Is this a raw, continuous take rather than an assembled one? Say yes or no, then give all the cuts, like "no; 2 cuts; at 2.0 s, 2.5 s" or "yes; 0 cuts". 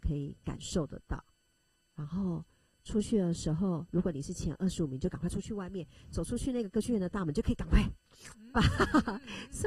yes; 0 cuts